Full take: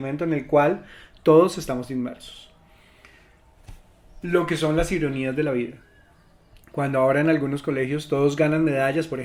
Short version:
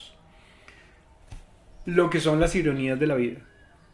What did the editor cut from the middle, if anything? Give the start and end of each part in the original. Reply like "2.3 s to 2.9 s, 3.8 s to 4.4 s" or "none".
none

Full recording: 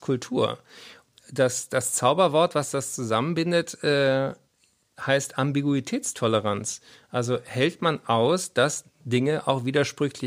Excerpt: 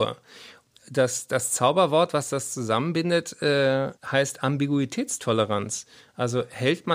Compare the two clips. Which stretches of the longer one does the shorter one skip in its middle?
4.4 s to 4.9 s

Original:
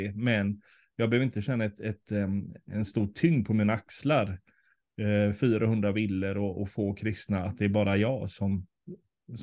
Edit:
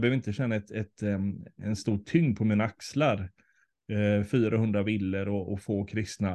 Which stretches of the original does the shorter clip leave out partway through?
none

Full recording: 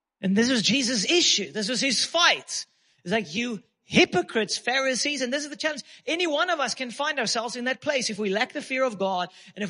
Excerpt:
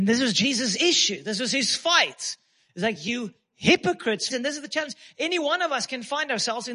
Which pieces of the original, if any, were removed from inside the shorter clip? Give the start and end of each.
4.6 s to 5.2 s

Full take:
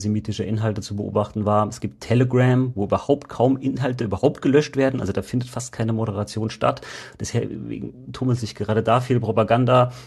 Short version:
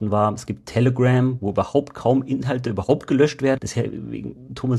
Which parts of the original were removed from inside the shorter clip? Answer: 4.9 s to 7.2 s

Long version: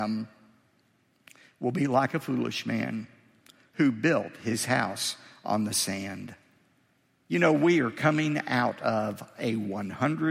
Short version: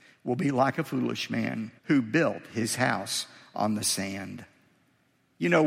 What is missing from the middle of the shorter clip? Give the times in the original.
3.1 s to 3.7 s

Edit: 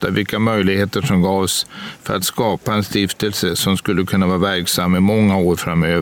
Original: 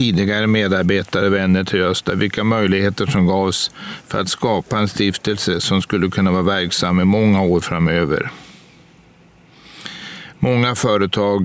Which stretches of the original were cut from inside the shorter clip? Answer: none

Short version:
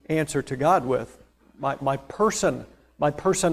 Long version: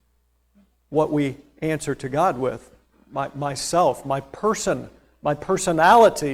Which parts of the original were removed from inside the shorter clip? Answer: 3.3 s to 4.0 s

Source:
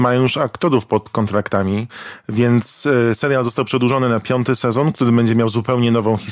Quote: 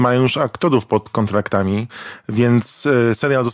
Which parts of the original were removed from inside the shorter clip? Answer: none

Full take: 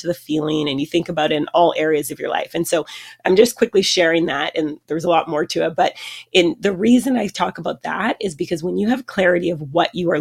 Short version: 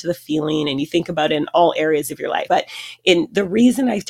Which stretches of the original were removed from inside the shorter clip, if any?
2.5 s to 5.8 s

